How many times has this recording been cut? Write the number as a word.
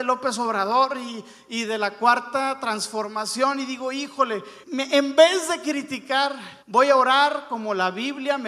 two